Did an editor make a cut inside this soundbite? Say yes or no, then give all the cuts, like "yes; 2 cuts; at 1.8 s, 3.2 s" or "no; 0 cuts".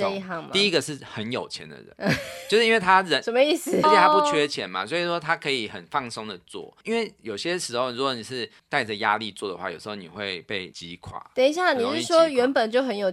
yes; 2 cuts; at 3.8 s, 6.8 s